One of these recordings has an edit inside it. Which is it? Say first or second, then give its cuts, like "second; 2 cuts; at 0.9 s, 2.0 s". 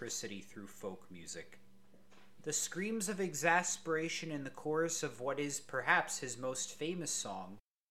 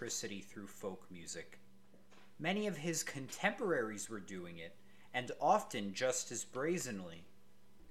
first; 1 cut; at 2.4 s